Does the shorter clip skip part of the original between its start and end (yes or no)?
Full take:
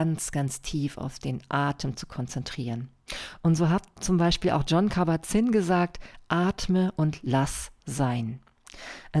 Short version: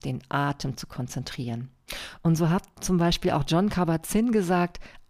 no